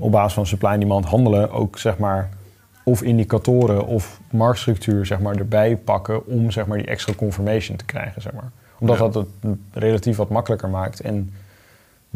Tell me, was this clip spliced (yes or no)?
no